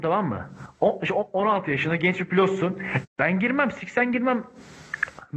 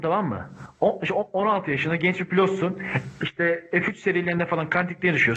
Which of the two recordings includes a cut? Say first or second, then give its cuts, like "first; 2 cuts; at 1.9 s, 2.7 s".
first; 1 cut; at 3.0 s